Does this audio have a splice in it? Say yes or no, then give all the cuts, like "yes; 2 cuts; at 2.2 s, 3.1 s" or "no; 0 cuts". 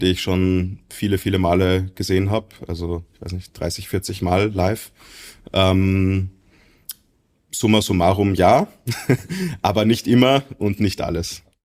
no; 0 cuts